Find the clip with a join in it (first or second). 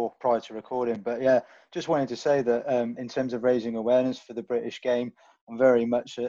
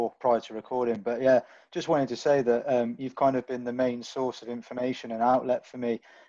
first